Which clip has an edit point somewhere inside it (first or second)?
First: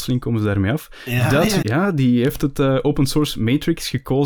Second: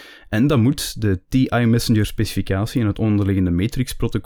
first